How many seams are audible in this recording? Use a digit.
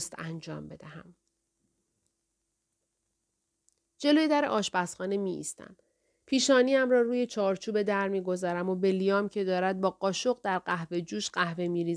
0